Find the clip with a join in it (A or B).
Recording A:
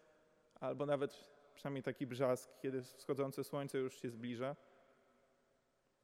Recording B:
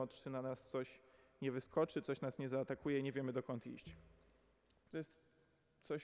B